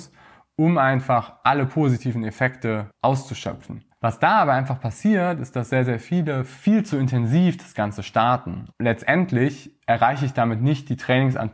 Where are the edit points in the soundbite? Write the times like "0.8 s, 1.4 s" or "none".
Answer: 8.7 s